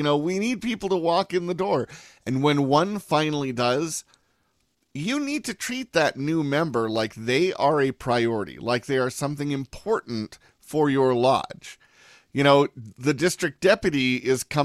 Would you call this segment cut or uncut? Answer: uncut